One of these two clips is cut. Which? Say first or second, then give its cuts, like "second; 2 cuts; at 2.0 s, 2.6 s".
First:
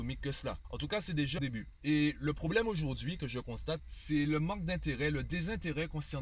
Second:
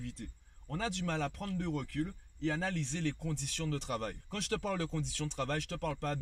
first; 2 cuts; at 1.4 s, 3.8 s